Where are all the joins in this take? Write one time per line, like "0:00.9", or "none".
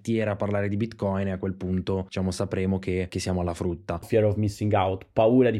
0:04.0